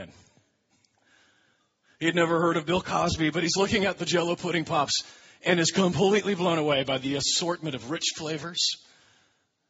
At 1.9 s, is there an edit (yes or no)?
no